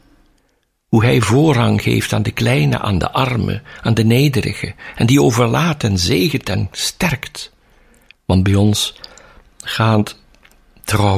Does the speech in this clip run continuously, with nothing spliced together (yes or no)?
no